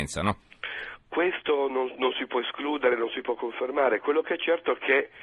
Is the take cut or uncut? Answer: uncut